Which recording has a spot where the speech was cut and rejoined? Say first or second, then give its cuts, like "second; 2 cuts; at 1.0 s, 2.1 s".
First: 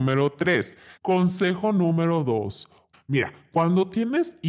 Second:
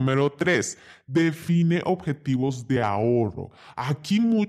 first; 2 cuts; at 1.0 s, 2.9 s